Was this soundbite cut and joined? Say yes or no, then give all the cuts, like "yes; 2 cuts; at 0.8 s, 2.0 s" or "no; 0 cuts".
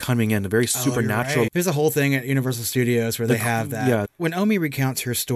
yes; 2 cuts; at 1.5 s, 4.1 s